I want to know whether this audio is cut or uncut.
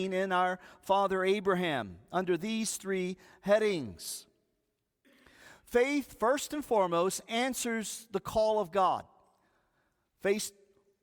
uncut